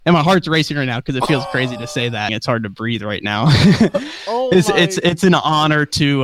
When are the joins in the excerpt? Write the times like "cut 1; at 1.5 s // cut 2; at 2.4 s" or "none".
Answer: cut 1; at 2.3 s